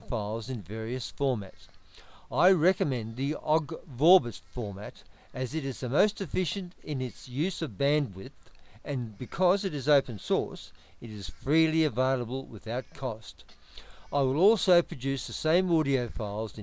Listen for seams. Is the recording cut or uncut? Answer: uncut